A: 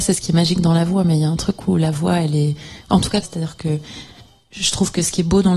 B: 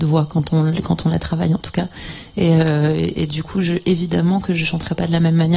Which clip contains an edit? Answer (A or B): A